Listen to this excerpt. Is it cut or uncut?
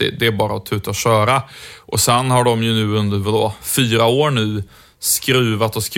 uncut